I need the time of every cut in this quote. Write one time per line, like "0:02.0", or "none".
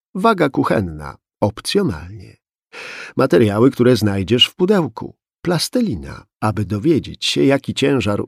0:06.3